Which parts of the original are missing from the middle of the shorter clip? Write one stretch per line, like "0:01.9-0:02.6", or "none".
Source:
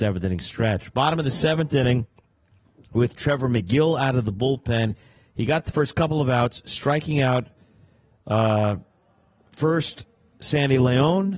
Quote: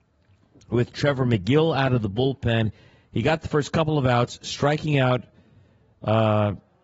none